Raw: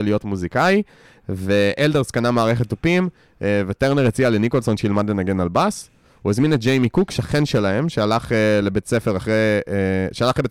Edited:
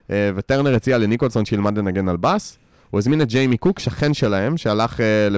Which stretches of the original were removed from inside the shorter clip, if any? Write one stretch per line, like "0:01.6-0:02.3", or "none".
none